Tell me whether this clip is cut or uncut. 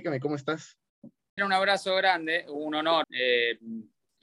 cut